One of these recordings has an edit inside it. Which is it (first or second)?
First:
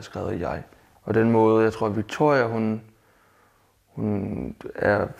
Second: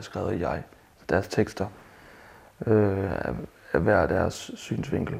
first